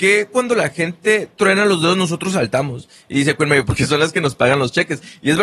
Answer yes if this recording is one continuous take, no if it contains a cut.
yes